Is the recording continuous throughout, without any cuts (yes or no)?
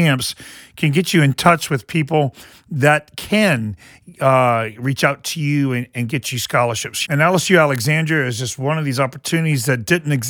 no